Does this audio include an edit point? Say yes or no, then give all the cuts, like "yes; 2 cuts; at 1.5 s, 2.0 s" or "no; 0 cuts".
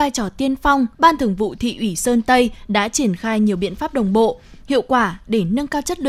yes; 1 cut; at 0.9 s